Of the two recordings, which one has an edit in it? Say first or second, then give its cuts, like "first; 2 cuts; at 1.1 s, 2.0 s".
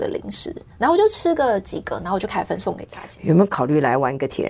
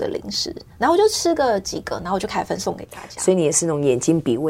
first; 1 cut; at 3.2 s